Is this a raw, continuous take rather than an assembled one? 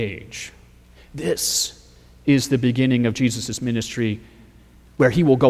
yes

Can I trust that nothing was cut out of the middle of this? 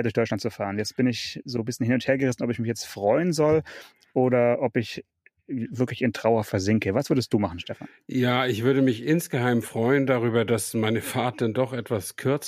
yes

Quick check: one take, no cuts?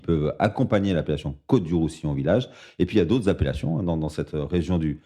yes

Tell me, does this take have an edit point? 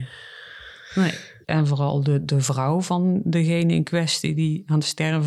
yes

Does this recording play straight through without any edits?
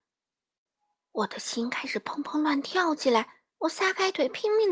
yes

